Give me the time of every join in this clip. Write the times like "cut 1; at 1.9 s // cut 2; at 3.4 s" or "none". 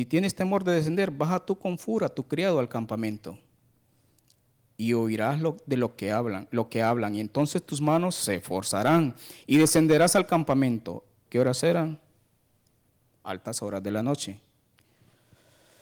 cut 1; at 11.3 s